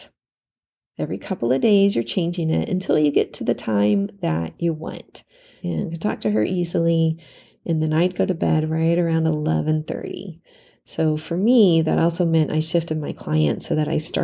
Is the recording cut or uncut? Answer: cut